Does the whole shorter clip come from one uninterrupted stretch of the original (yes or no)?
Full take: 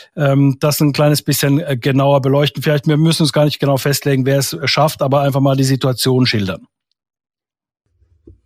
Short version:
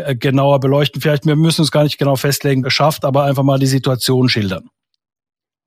no